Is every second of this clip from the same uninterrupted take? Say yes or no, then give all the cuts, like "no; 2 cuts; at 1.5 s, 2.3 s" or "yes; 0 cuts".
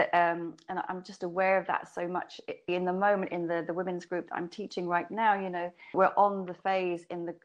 no; 2 cuts; at 2.7 s, 5.9 s